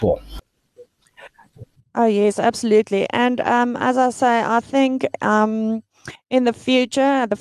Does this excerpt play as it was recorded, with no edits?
yes; 0 cuts

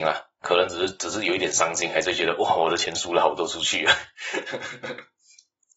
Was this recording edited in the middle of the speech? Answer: no; 0 cuts

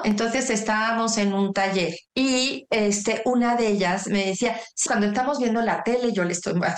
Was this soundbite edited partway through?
yes; 1 cut; at 4.9 s

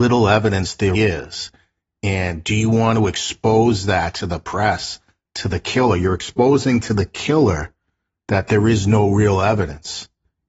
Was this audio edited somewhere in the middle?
yes; 1 cut; at 0.9 s

